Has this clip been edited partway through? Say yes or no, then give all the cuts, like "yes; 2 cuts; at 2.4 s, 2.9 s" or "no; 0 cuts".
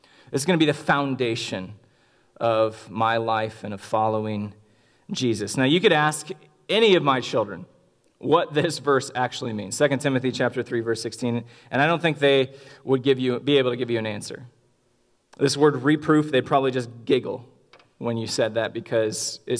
no; 0 cuts